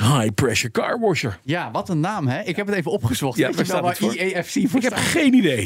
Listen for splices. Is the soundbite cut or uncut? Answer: uncut